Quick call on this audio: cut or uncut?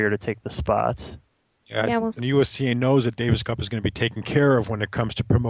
cut